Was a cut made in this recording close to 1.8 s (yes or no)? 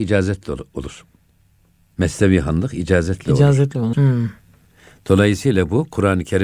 no